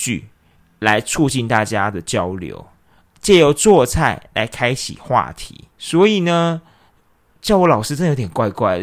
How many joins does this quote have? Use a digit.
1